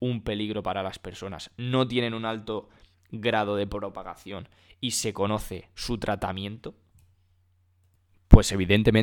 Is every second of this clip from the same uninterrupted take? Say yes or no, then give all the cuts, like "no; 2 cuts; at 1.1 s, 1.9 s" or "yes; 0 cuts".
yes; 0 cuts